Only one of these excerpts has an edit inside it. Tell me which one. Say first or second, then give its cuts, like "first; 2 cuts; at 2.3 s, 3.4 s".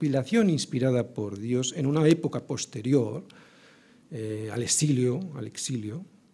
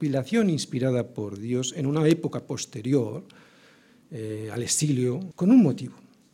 second; 1 cut; at 5.3 s